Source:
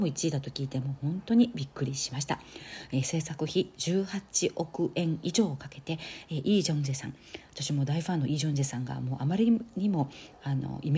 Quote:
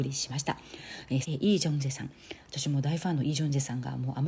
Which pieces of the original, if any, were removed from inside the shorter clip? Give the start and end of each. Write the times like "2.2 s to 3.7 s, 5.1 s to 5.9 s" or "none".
3.0 s to 6.3 s